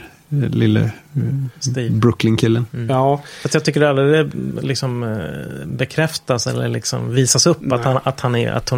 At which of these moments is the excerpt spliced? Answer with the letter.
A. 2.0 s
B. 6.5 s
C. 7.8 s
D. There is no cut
D